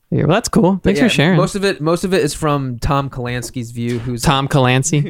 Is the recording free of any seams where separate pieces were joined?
yes; 0 cuts

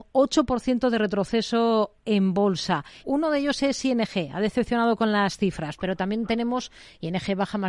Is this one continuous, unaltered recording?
no; 1 cut; at 3.0 s

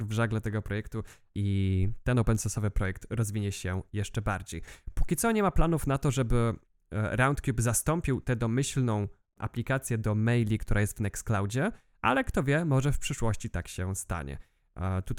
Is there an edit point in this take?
no; 0 cuts

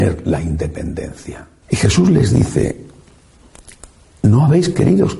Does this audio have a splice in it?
yes; 1 cut; at 1.6 s

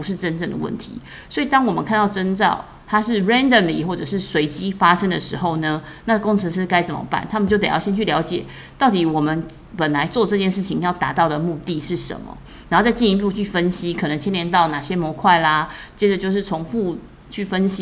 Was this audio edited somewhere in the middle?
no; 0 cuts

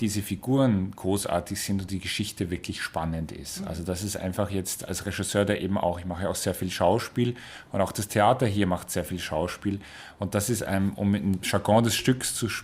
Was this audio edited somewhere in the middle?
no; 0 cuts

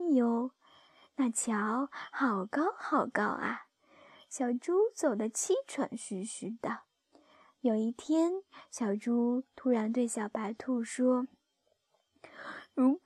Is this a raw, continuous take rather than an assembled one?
yes; 0 cuts

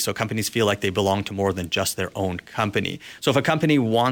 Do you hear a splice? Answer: no; 0 cuts

